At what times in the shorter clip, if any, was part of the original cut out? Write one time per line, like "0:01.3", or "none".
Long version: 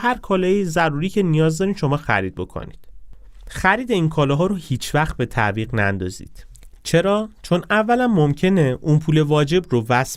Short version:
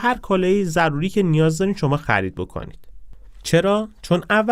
0:03.4

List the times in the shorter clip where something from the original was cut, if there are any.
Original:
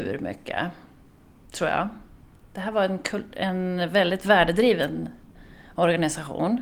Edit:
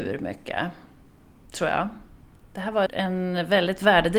0:02.9

